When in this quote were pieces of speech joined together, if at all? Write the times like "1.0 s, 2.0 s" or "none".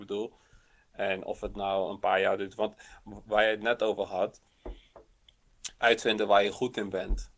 5.8 s